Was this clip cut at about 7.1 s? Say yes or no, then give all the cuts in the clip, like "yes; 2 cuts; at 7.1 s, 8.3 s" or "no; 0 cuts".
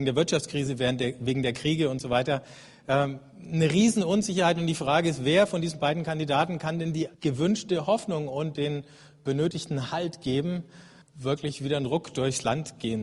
yes; 2 cuts; at 7.1 s, 11.0 s